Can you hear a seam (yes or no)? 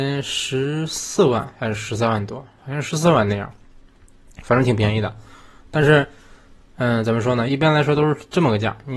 yes